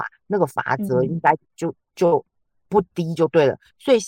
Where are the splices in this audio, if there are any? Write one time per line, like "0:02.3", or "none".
none